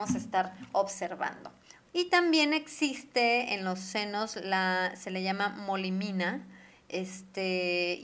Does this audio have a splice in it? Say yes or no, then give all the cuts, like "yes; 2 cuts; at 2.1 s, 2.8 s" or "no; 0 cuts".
yes; 1 cut; at 1.9 s